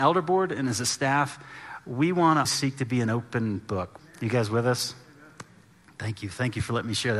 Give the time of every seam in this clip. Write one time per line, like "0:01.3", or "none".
0:02.5
0:04.0